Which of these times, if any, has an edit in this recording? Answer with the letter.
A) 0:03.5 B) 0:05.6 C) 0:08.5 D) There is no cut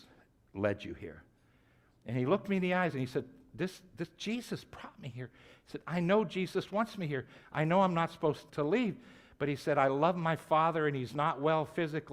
C